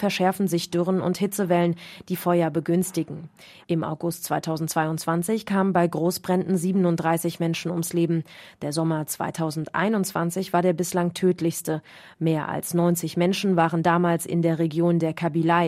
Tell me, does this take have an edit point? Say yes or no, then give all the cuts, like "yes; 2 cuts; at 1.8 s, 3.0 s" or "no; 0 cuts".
no; 0 cuts